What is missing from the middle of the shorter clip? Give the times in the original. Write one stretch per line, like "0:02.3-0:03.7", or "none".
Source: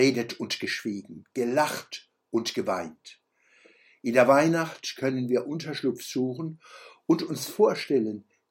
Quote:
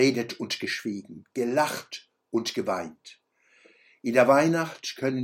none